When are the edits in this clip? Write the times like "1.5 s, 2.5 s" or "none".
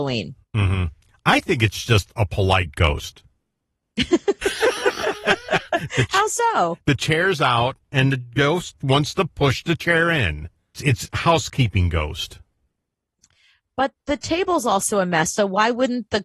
8.8 s, 10.7 s